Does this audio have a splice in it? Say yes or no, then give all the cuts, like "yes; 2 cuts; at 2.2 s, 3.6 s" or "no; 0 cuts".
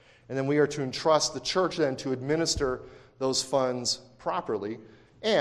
no; 0 cuts